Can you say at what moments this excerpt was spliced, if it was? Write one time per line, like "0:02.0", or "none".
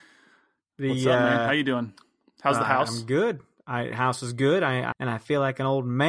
0:04.9